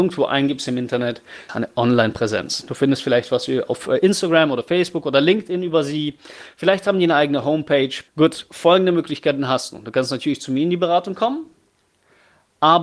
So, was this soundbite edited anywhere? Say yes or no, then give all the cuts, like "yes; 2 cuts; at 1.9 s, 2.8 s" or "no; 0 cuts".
yes; 2 cuts; at 1.5 s, 8.1 s